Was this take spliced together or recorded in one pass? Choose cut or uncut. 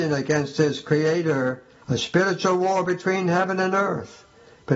cut